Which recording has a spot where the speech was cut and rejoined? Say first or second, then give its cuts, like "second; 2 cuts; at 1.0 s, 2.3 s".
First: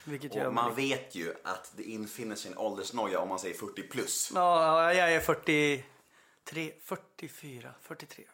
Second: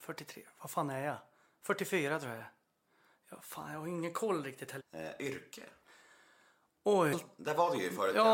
second; 2 cuts; at 4.8 s, 7.1 s